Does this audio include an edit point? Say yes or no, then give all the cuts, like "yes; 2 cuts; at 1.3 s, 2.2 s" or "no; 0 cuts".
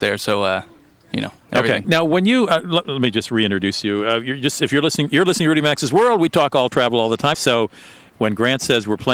yes; 2 cuts; at 1.8 s, 7.3 s